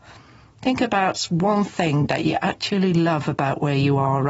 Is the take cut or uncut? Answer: uncut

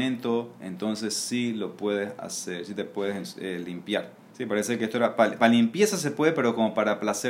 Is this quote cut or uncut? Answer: cut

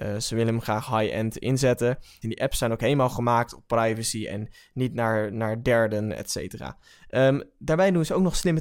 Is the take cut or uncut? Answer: cut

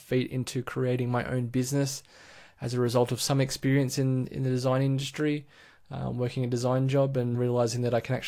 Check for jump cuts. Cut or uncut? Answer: cut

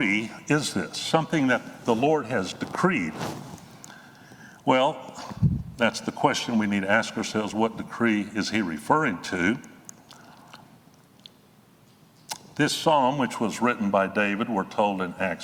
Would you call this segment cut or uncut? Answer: uncut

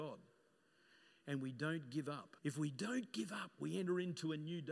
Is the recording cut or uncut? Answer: cut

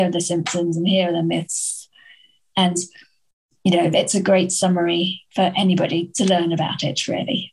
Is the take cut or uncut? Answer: uncut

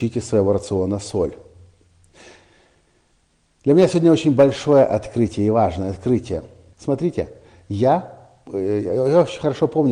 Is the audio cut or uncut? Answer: cut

